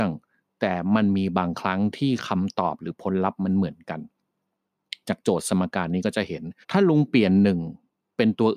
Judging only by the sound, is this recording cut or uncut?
cut